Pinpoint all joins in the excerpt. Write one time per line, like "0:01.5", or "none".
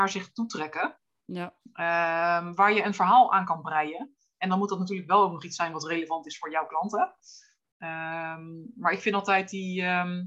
none